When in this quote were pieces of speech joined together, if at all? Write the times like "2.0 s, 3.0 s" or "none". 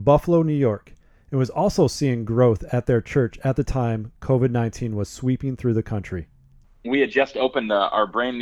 none